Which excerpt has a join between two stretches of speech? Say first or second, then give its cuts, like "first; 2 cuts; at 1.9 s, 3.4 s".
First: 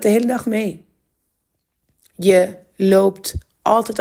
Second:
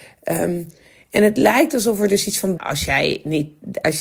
second; 1 cut; at 2.6 s